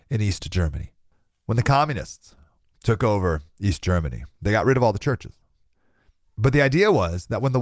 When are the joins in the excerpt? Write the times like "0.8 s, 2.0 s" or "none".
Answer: 6.2 s